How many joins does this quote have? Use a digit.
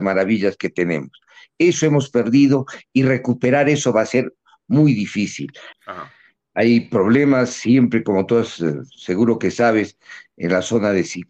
1